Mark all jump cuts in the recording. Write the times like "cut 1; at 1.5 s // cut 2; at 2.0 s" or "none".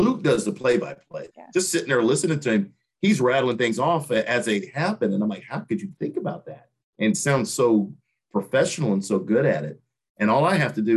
cut 1; at 1.3 s